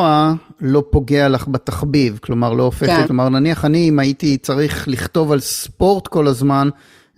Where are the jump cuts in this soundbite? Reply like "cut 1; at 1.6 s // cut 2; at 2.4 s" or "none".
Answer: cut 1; at 3.0 s